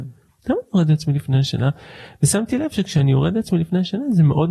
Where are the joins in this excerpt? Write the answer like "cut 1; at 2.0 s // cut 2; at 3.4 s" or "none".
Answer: none